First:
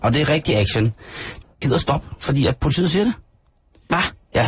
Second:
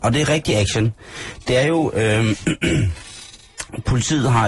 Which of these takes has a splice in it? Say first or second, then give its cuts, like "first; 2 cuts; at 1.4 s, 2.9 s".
first; 1 cut; at 1.4 s